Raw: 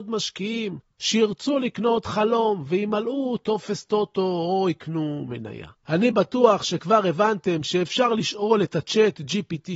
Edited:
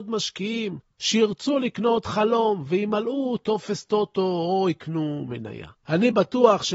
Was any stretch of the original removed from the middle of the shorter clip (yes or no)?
no